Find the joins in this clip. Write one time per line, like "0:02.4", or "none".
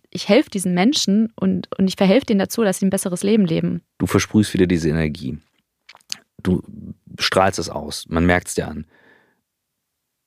0:03.9